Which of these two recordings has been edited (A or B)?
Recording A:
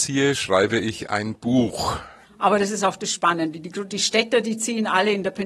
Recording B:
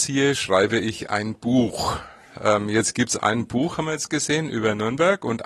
A